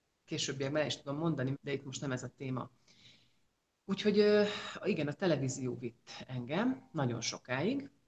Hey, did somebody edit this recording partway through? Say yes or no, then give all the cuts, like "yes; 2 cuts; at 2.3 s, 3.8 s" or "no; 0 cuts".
yes; 1 cut; at 1.5 s